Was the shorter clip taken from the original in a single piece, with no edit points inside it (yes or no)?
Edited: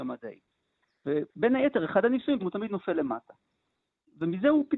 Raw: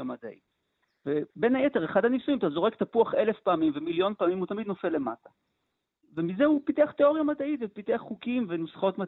no